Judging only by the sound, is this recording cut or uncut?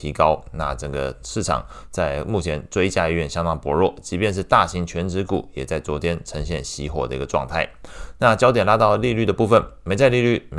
uncut